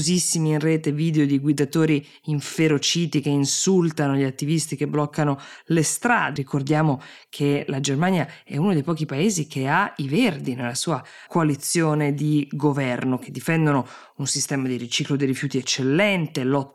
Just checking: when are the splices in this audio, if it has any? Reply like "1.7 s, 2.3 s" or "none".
6.4 s, 11.3 s